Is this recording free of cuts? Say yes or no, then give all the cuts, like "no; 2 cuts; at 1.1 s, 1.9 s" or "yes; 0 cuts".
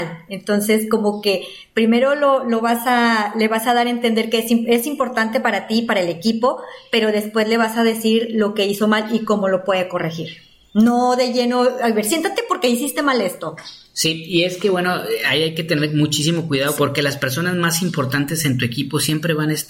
no; 1 cut; at 16.8 s